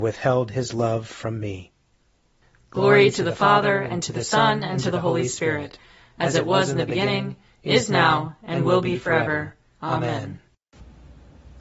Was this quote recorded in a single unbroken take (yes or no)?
yes